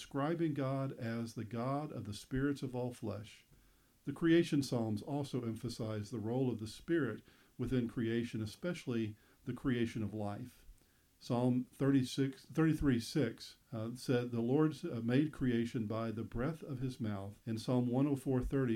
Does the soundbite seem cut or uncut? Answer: cut